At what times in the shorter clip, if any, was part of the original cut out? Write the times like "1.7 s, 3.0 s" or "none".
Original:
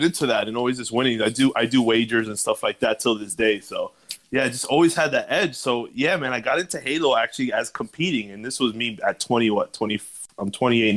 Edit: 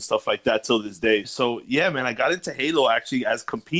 1.2 s